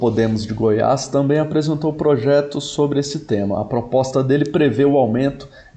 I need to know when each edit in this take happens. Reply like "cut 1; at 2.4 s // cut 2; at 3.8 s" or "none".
none